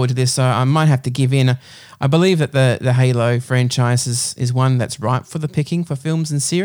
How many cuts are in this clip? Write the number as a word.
zero